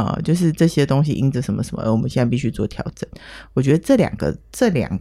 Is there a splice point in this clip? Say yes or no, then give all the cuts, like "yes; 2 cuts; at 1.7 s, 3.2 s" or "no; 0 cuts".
no; 0 cuts